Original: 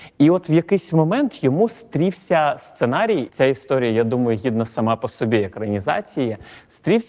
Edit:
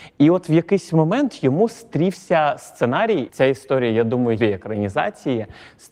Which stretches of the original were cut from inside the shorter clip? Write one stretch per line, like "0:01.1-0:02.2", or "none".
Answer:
0:04.4-0:05.3

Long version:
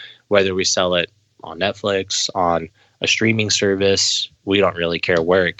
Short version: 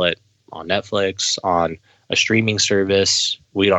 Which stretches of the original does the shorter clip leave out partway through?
none

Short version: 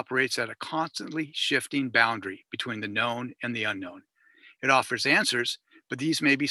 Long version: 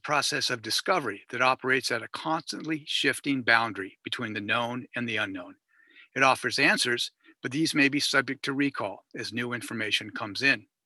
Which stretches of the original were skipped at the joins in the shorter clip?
none

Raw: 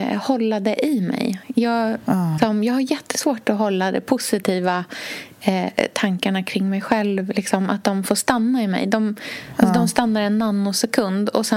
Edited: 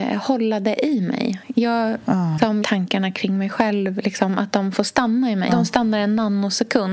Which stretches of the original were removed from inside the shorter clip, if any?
0:02.6-0:05.9
0:08.8-0:09.7

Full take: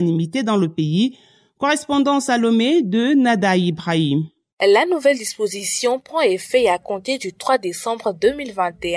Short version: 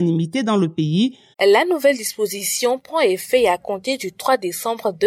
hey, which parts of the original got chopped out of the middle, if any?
0:01.3-0:04.5

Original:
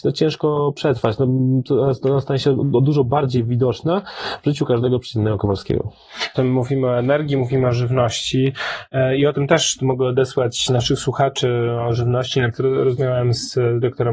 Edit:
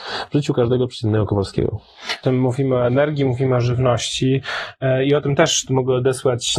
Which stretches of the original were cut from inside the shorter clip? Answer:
none

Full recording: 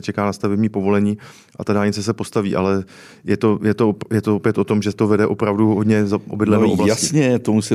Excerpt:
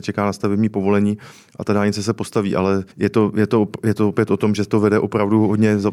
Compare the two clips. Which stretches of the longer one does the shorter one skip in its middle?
0:02.9-0:03.2

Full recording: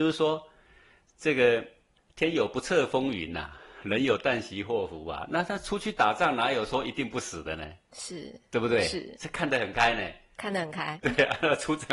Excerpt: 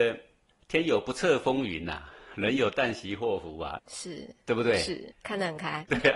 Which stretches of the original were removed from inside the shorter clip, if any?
0:05.3-0:07.8
0:09.2-0:10.3

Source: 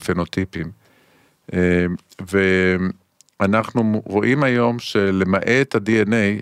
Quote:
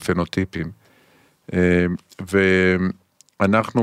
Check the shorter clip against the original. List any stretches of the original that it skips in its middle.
none

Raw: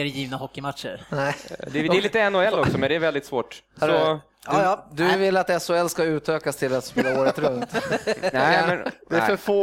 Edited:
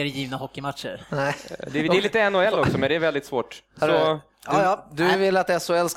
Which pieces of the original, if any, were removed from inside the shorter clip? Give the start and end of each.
none

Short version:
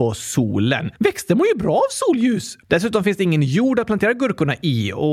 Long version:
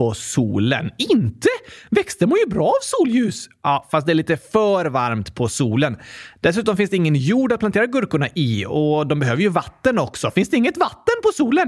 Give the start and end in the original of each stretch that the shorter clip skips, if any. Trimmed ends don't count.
0:00.9-0:01.8
0:03.5-0:06.3

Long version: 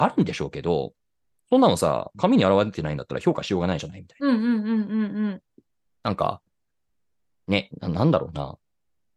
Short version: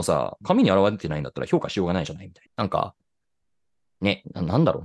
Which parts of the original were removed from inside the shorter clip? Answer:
0:04.2-0:05.9

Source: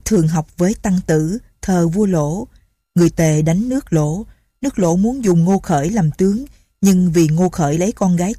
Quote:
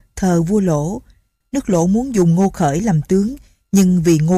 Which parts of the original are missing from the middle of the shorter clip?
0:02.9-0:04.5

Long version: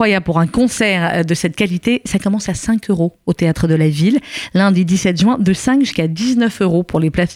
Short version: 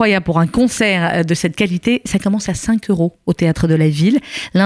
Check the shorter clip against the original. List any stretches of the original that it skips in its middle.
none

